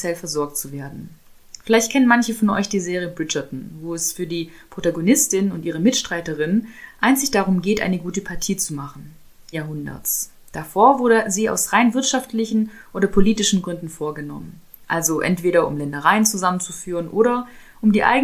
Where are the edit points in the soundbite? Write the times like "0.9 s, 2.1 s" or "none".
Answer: 9.5 s